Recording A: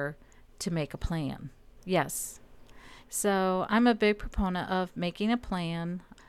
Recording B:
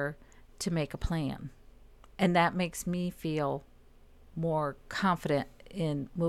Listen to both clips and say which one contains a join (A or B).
A